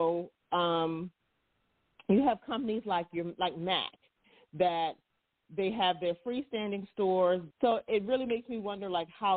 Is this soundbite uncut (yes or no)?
no